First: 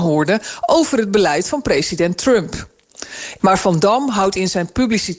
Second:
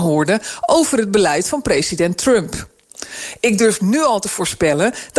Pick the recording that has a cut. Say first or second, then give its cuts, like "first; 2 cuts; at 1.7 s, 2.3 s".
first; 1 cut; at 3.4 s